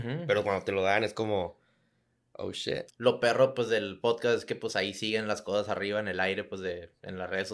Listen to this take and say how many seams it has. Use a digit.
1